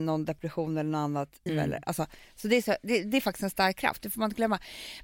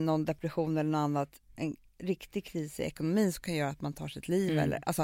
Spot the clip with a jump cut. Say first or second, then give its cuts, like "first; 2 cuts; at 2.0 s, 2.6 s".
first; 1 cut; at 1.5 s